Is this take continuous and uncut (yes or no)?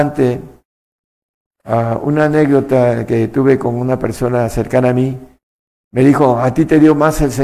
yes